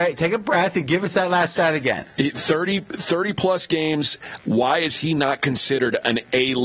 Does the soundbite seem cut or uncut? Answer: cut